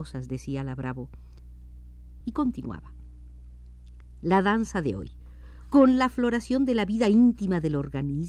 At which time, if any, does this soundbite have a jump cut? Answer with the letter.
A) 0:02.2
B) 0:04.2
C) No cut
A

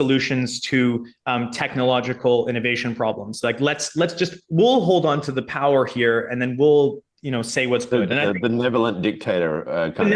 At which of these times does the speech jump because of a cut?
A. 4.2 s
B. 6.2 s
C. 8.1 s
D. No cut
D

